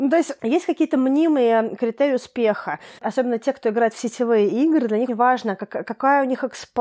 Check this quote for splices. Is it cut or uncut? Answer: cut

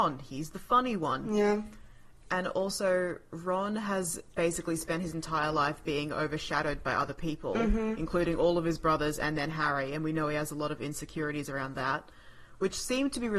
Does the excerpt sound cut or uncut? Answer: uncut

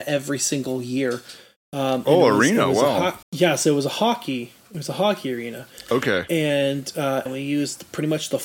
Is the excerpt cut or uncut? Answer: cut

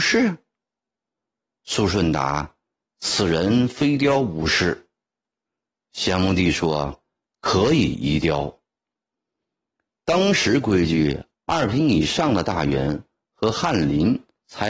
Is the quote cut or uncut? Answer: uncut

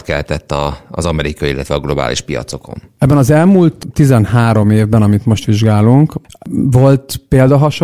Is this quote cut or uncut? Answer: uncut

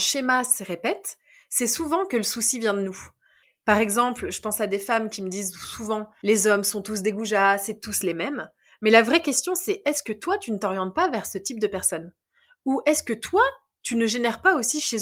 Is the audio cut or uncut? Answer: uncut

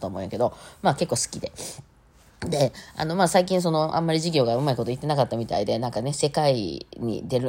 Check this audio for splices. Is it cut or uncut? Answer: uncut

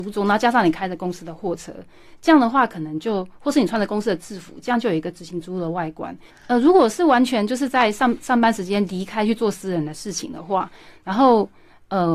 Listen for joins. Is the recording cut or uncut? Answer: cut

